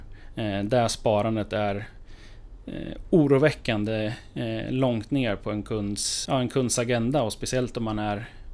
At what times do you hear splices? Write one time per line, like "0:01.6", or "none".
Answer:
0:06.2